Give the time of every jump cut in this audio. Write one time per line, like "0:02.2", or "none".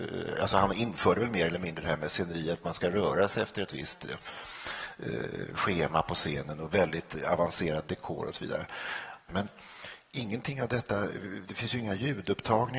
0:09.3